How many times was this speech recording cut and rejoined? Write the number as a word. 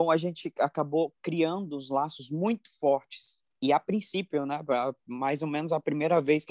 zero